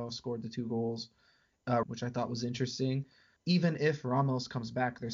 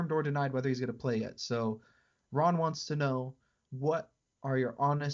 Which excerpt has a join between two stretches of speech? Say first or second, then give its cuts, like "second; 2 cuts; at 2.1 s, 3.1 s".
first; 2 cuts; at 1.8 s, 3.4 s